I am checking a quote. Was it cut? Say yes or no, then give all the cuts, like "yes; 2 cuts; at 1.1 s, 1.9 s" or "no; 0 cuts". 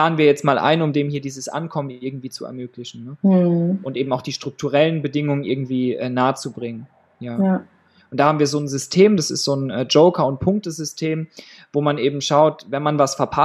no; 0 cuts